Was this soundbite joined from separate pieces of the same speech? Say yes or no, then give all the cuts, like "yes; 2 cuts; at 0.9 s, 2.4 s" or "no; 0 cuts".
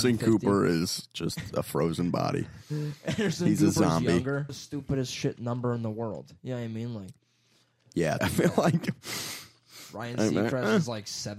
yes; 2 cuts; at 4.5 s, 8.2 s